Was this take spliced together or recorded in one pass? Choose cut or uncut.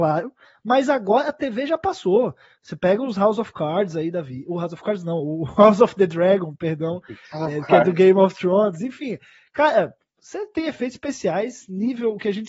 uncut